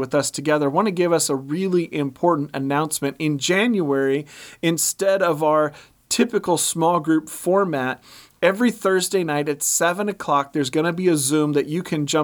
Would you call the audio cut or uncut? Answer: uncut